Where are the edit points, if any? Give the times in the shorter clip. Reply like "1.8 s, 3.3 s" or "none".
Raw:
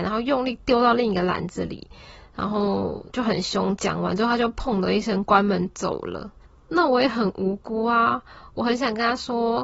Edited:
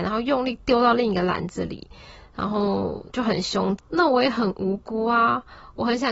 3.8 s

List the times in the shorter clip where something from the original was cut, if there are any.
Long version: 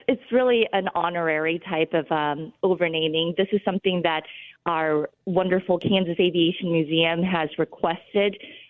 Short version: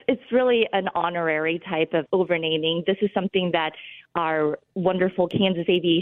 2.1 s

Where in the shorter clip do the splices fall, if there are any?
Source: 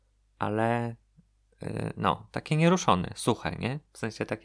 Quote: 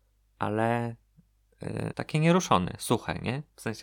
1.9 s

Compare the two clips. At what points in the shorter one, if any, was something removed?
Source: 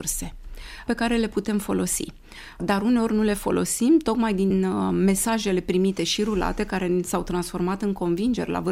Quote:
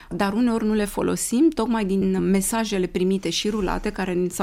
2.2 s

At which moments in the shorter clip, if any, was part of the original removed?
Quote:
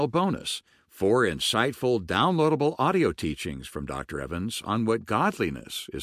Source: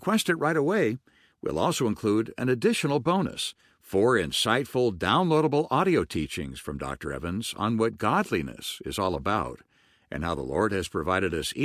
none

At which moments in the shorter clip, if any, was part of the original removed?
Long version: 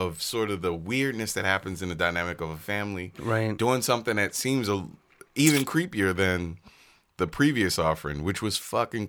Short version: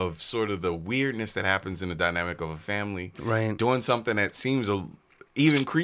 none

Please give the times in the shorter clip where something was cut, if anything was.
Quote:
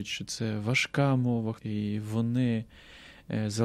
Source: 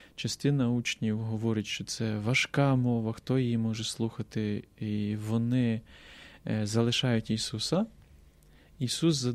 1.6 s

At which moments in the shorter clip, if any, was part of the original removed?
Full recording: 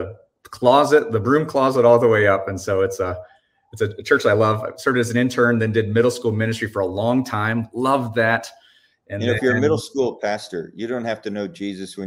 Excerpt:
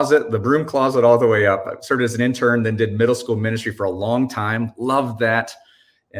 1.6 s

